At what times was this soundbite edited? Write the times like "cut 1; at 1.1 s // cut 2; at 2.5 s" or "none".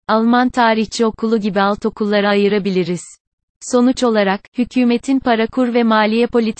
cut 1; at 3.4 s